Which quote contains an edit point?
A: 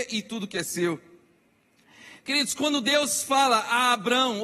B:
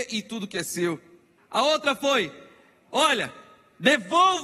B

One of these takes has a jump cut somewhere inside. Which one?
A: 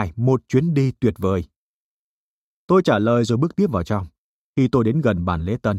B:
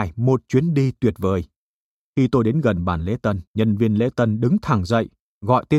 B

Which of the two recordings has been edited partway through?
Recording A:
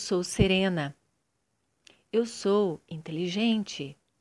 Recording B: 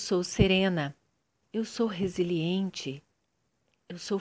B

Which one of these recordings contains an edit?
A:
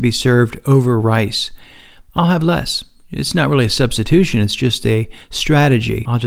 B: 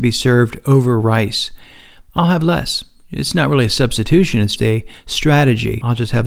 B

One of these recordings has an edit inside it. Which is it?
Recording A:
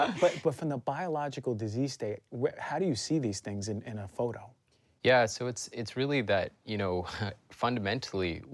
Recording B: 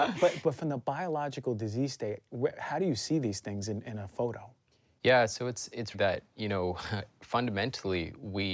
B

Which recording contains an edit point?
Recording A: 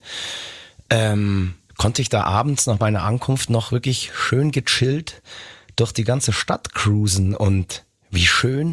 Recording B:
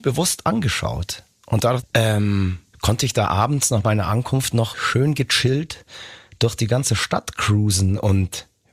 B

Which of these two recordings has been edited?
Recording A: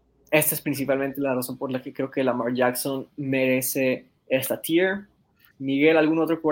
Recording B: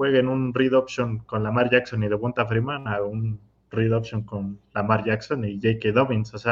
A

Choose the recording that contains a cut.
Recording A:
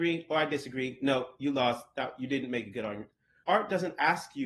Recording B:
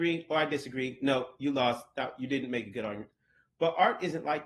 A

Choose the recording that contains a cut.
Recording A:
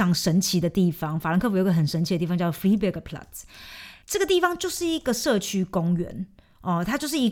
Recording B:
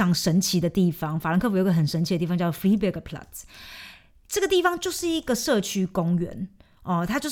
A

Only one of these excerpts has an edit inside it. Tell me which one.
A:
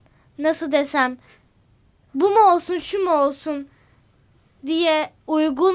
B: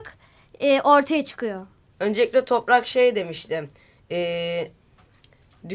B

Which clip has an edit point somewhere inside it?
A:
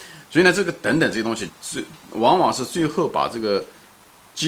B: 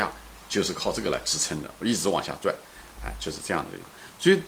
A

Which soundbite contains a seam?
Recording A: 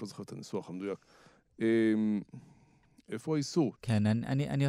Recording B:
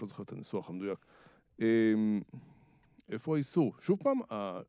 A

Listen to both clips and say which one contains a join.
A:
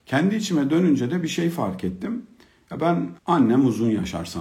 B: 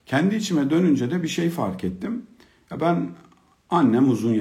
A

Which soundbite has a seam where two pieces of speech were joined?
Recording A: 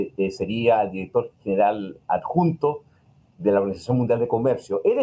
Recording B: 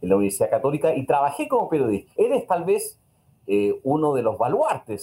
B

